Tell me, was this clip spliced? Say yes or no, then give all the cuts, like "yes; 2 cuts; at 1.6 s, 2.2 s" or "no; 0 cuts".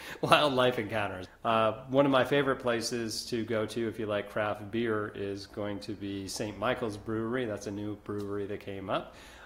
yes; 1 cut; at 1.3 s